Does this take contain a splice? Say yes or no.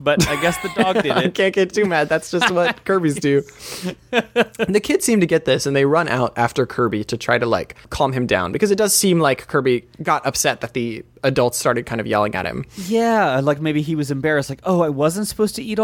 yes